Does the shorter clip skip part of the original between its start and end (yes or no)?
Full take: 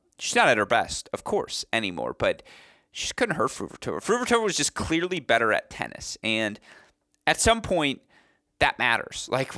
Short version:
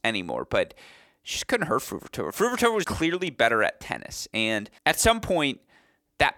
yes